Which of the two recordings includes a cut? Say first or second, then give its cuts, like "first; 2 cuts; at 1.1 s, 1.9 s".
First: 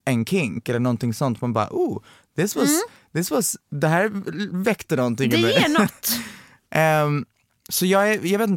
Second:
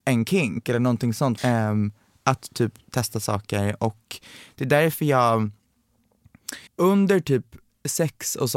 second; 2 cuts; at 1.4 s, 6.7 s